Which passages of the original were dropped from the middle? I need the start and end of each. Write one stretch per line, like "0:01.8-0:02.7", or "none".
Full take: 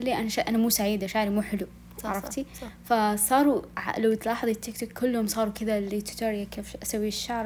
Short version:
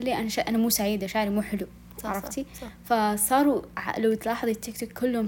none